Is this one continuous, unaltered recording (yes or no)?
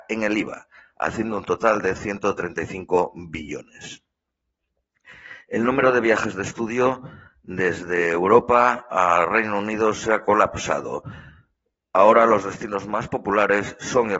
yes